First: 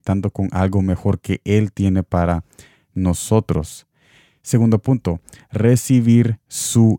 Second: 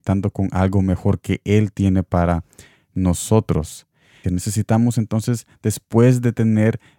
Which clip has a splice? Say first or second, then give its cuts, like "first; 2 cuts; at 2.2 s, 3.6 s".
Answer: second; 1 cut; at 4.2 s